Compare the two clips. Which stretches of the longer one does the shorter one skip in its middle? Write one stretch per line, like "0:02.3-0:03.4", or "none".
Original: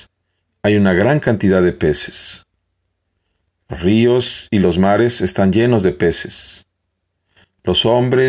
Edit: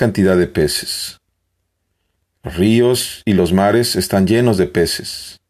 none